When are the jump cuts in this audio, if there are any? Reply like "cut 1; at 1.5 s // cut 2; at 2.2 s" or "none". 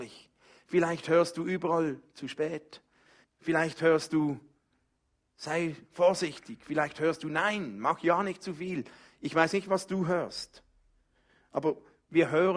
cut 1; at 3.2 s

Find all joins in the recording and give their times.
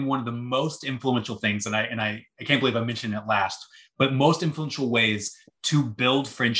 none

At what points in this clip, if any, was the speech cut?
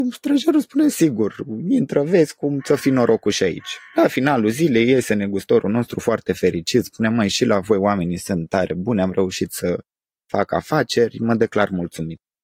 none

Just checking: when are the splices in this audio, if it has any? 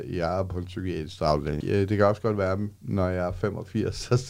cut 1; at 1.6 s

